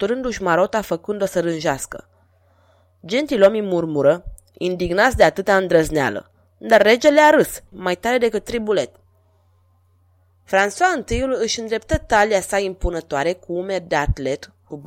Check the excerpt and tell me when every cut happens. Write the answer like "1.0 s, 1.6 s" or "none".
7.7 s

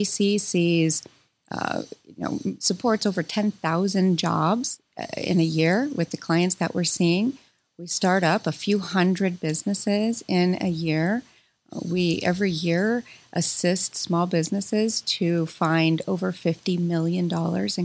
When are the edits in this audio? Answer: none

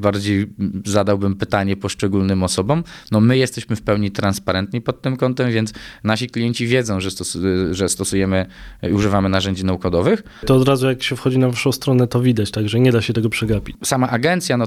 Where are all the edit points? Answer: none

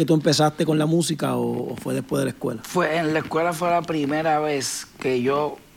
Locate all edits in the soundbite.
none

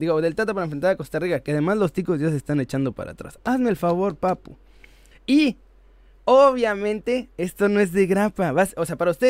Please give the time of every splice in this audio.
3.4 s, 5.1 s

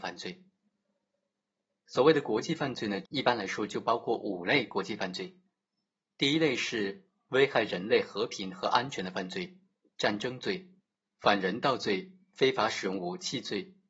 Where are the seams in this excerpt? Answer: 3.0 s, 9.9 s

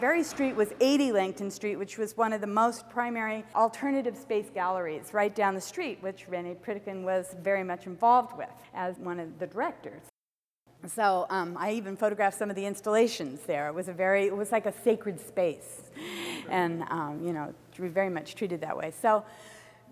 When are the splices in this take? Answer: none

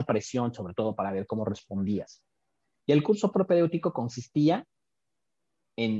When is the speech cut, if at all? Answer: 2.8 s

